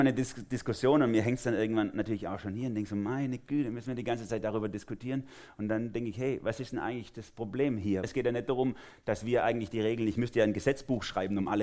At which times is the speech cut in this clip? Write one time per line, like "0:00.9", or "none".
0:08.0